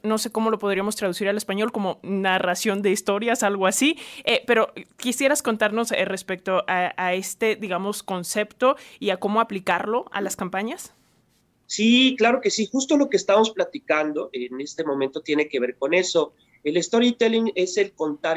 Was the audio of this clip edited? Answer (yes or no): no